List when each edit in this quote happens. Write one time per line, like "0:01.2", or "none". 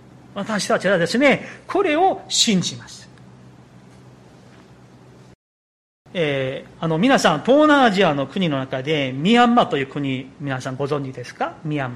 none